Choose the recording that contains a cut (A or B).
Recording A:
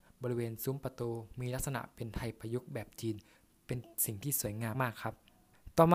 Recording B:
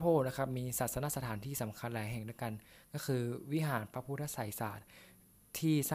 A